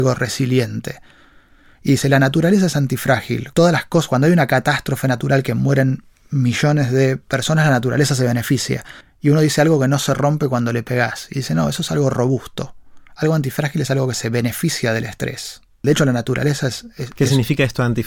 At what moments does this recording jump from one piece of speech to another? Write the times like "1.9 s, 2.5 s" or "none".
3.5 s, 9.0 s, 15.8 s